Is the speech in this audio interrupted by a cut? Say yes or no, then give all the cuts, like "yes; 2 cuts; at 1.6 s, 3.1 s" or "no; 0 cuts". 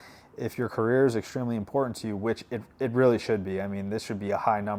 no; 0 cuts